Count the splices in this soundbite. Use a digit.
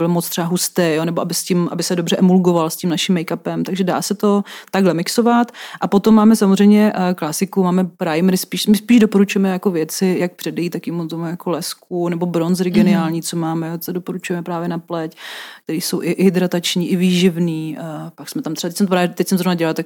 0